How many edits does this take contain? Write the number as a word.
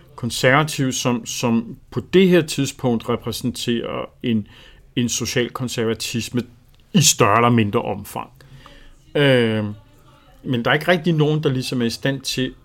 one